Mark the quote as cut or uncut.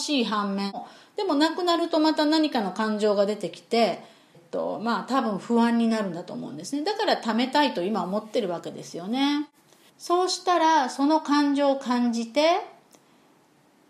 cut